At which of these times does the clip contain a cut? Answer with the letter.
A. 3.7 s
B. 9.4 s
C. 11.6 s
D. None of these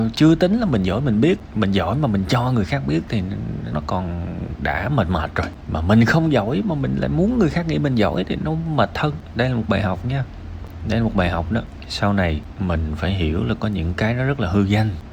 A